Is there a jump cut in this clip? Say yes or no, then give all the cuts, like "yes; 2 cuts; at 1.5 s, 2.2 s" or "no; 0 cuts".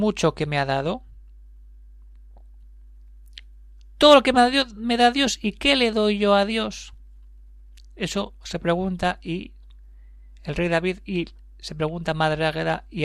no; 0 cuts